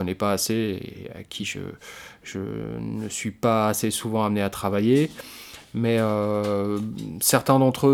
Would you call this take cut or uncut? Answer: uncut